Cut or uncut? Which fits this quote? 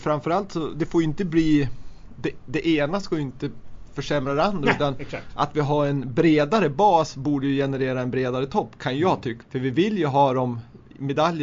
cut